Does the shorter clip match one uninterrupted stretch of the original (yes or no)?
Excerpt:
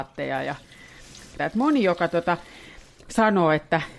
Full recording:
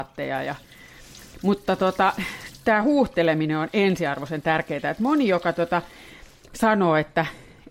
no